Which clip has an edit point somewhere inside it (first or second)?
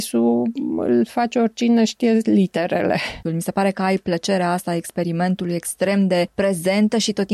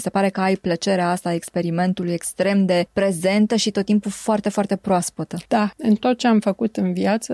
first